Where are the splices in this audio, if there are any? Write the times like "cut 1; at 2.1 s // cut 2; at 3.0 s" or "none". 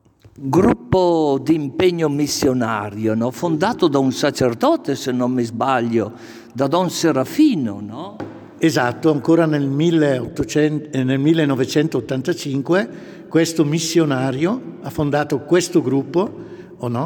none